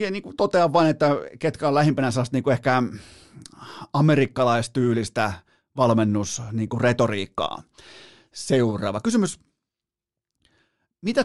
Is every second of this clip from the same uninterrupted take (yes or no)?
yes